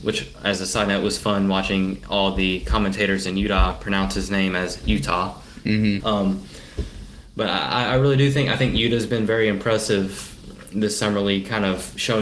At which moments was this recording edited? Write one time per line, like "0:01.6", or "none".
0:06.0